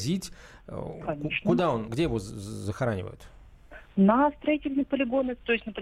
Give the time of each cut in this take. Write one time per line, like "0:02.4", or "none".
0:01.9